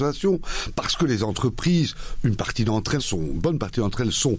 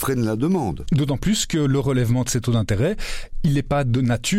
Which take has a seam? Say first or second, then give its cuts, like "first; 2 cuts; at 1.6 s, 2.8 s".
first; 1 cut; at 3.0 s